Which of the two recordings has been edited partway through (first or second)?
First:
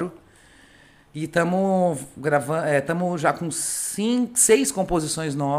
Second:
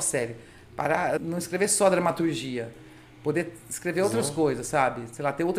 second